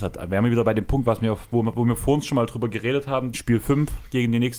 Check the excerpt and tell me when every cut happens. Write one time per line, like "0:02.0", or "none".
0:03.3